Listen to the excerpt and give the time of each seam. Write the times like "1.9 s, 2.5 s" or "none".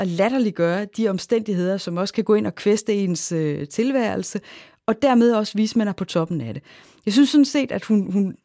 none